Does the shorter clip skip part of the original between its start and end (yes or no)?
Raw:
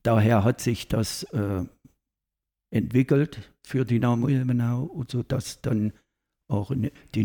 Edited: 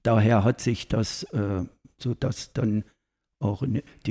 yes